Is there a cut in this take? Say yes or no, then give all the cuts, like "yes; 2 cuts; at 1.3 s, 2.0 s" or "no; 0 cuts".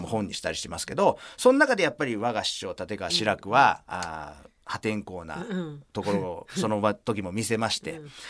no; 0 cuts